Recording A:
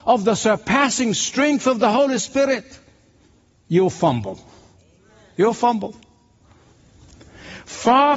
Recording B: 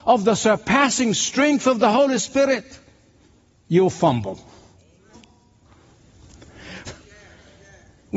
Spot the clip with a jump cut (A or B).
B